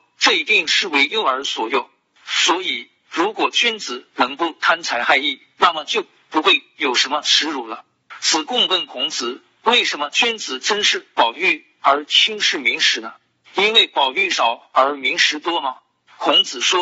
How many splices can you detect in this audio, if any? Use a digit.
0